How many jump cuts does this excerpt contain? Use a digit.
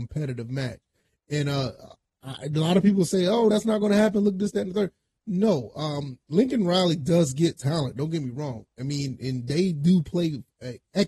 0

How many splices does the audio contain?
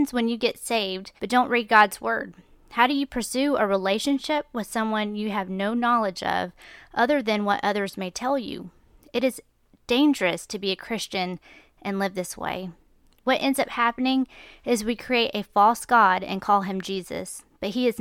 1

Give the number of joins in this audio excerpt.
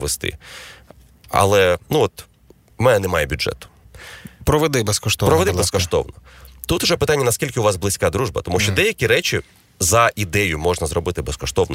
1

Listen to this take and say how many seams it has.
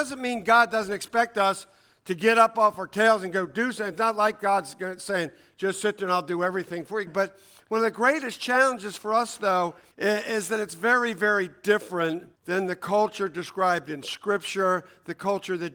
3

